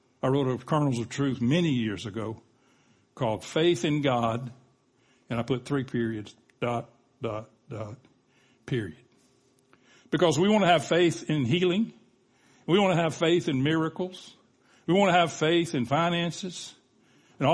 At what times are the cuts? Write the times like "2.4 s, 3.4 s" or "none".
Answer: none